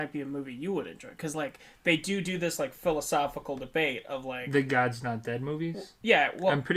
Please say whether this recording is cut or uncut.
uncut